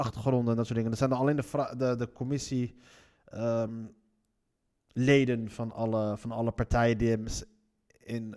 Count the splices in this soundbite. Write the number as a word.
zero